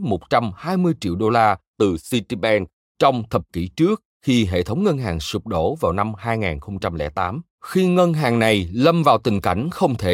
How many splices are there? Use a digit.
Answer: 1